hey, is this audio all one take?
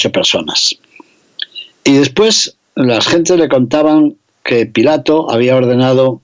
no; 1 cut; at 1.7 s

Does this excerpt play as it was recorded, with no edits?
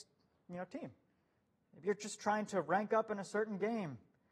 no; 1 cut; at 1.6 s

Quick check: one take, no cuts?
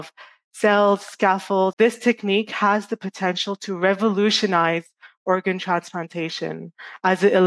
no; 1 cut; at 1.7 s

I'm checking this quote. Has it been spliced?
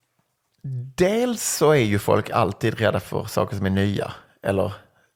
no; 0 cuts

